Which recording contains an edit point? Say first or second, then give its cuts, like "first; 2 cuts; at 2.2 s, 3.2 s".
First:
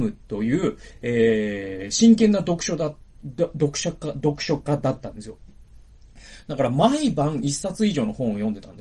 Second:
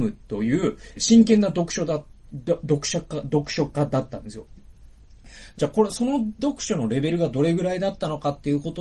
second; 2 cuts; at 1.0 s, 5.6 s